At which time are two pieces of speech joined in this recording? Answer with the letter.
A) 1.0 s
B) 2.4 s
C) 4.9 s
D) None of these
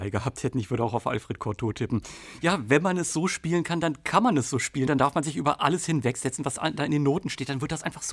C